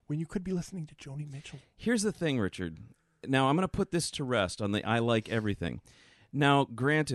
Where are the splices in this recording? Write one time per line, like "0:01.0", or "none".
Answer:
none

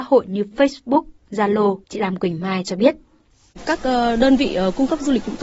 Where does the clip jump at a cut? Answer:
0:01.8

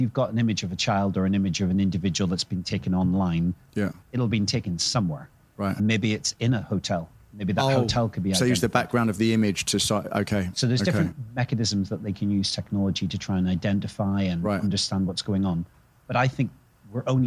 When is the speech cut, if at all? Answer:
none

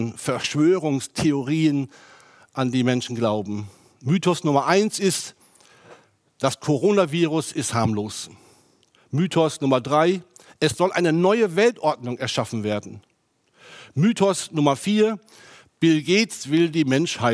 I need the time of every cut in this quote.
0:08.9

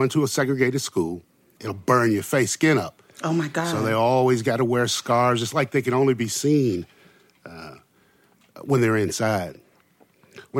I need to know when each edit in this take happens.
0:01.6

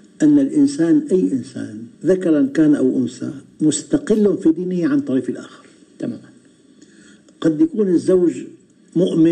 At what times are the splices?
0:01.9

